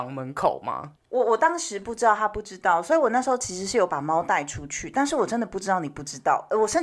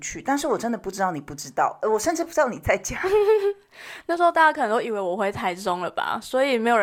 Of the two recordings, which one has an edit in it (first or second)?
first